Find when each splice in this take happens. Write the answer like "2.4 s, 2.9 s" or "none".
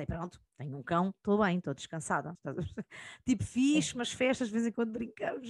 2.3 s

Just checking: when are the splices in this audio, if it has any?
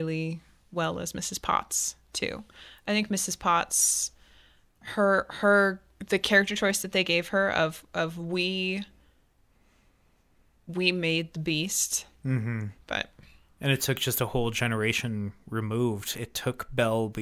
4.7 s, 12.8 s, 16.1 s

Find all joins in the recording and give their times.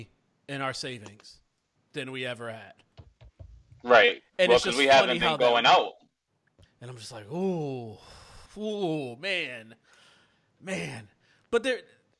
6.6 s, 8.5 s

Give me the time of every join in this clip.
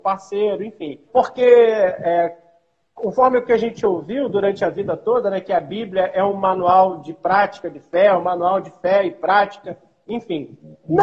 1.1 s

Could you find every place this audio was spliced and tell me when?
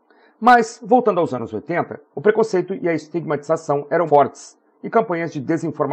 2.1 s, 4.1 s

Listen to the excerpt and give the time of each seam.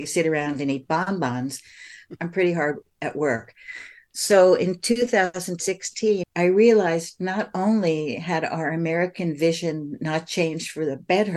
2.2 s, 6.2 s

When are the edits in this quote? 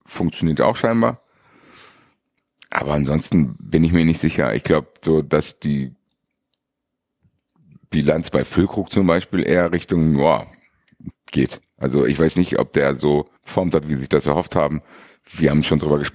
11.1 s, 13.4 s

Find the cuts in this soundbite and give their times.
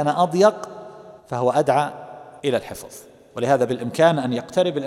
1.2 s, 2.4 s

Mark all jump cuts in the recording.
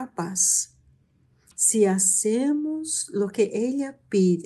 1.5 s

